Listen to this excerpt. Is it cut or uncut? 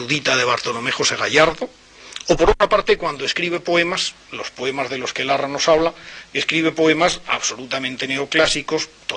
uncut